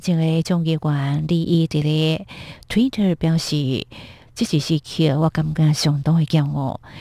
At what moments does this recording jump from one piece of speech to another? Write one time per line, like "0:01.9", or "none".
0:04.3

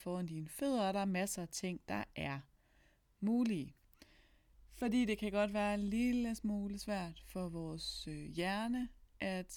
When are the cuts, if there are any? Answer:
0:04.5

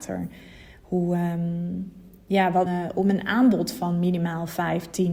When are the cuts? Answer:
0:02.7

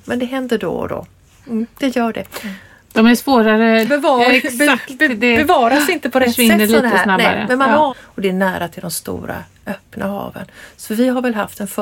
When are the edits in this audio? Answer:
0:03.8
0:07.9

